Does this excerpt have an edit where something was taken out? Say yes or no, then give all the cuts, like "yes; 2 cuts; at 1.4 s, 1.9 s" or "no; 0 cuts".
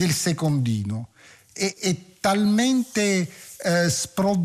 yes; 1 cut; at 1.7 s